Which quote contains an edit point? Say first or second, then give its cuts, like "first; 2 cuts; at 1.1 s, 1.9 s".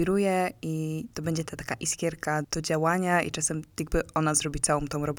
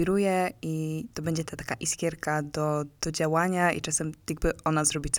first; 1 cut; at 2.4 s